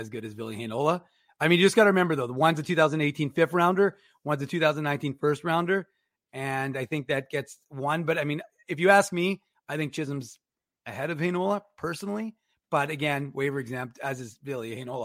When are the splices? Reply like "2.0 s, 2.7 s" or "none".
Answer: none